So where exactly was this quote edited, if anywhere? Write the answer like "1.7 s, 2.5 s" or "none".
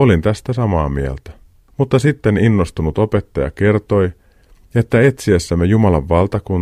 none